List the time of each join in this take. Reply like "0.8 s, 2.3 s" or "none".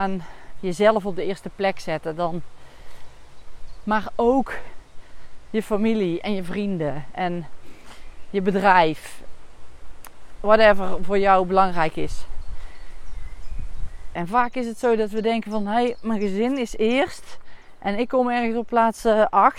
3.8 s, 14.2 s